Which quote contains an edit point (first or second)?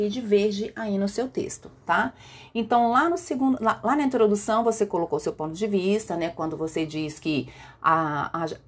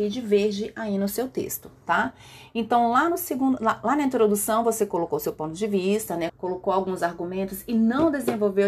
second